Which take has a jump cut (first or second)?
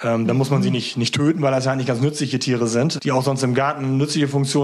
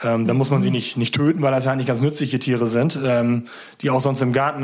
first